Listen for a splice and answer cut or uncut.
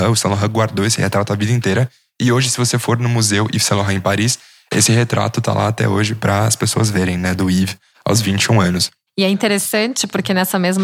uncut